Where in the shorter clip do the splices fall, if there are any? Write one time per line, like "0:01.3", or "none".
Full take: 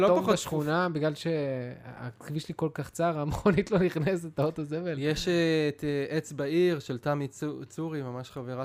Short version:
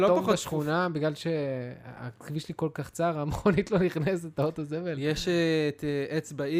none